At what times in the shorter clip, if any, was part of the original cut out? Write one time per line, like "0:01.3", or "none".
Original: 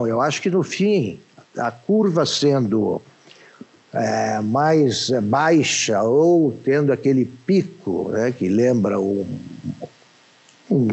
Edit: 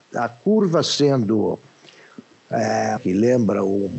0:03.0

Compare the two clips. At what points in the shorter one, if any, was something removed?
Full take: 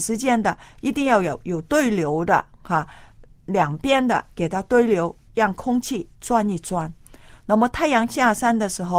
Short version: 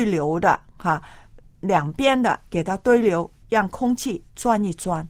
none

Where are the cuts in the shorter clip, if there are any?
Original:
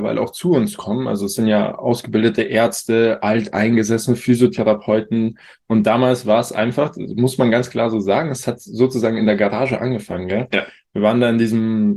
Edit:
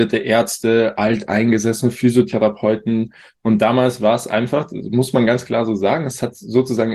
none

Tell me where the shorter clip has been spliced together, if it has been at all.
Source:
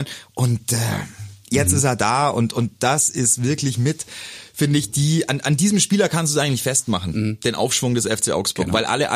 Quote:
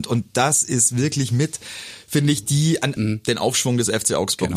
0:03.0

